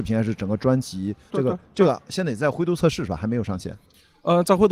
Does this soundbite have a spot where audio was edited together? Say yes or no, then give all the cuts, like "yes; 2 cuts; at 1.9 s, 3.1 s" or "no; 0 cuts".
yes; 1 cut; at 1.3 s